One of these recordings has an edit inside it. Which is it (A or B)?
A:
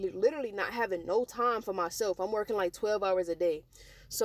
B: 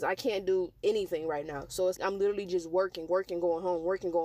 B